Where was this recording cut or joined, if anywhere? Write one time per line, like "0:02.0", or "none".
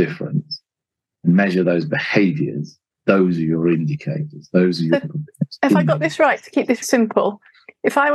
0:06.8